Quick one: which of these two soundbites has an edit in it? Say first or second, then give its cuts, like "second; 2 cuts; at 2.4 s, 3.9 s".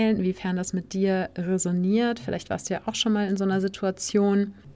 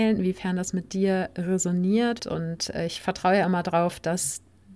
second; 1 cut; at 2.2 s